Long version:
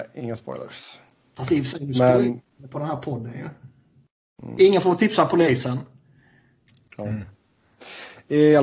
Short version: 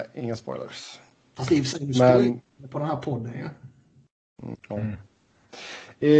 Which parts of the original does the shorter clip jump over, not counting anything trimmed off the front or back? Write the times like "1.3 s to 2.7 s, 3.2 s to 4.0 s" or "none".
4.5 s to 6.8 s